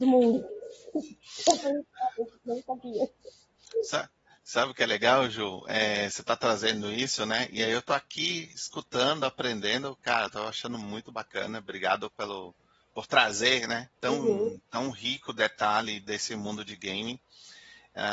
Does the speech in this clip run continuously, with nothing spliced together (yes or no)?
no